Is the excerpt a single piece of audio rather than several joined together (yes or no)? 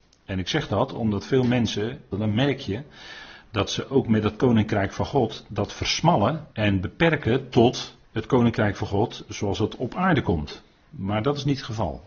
no